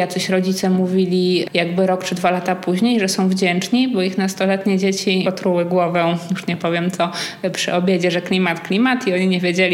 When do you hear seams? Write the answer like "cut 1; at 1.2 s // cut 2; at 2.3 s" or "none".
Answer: cut 1; at 5.2 s